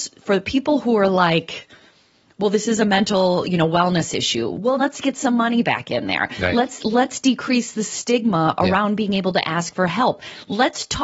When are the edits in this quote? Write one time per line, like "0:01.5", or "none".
0:04.8